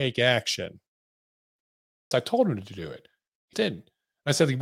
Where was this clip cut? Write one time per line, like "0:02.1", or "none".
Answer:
0:02.1
0:03.5